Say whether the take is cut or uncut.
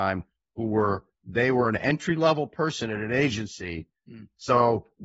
cut